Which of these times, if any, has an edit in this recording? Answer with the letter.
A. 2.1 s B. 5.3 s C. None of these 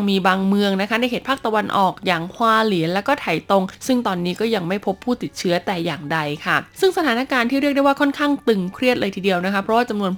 C